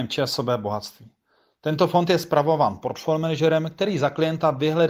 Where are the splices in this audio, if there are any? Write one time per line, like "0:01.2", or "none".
none

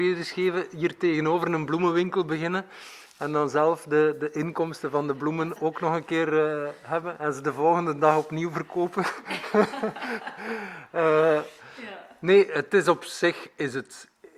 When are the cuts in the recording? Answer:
none

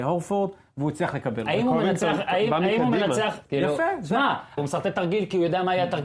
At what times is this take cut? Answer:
0:03.5
0:04.6

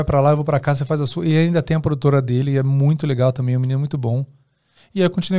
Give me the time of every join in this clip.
none

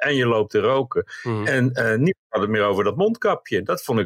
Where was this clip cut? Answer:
none

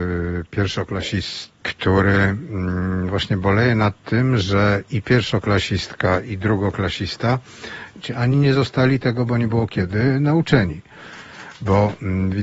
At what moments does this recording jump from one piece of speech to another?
0:01.6
0:08.0

